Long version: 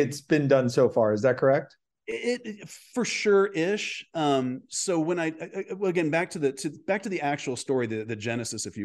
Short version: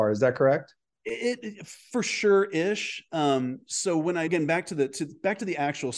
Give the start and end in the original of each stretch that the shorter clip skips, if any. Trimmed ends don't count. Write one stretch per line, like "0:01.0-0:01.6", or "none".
0:05.3-0:05.9